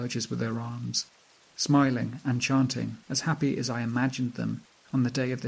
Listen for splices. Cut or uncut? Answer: cut